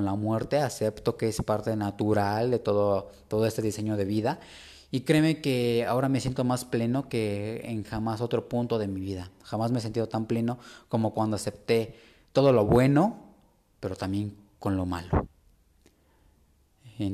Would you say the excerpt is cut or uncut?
uncut